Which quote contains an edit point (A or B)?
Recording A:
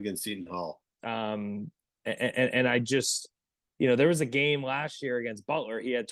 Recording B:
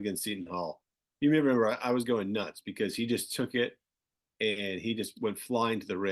A